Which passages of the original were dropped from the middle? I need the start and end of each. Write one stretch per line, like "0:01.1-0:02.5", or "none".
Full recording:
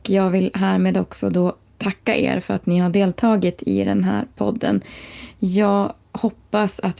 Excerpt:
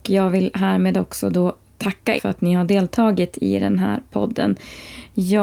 0:02.2-0:02.4